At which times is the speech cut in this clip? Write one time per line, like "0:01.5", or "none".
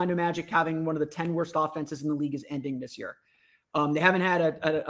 none